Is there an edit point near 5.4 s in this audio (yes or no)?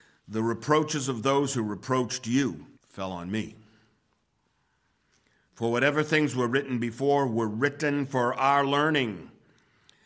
no